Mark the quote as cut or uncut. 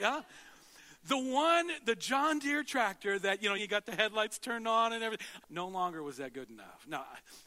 cut